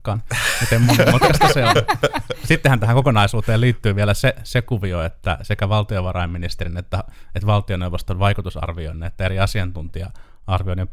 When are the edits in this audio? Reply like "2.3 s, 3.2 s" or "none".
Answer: none